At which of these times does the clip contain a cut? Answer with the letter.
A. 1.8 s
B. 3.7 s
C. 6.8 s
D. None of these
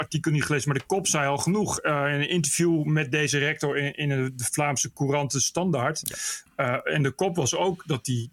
D